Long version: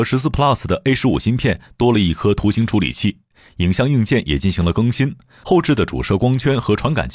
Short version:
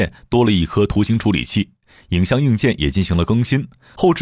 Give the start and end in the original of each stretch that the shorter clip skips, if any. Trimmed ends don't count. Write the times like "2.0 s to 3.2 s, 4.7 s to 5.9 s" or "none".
none